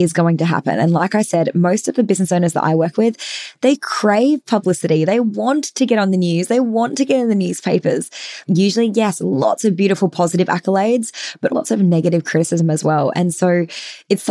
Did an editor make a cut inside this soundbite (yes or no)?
yes